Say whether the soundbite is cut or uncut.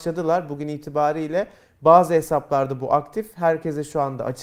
uncut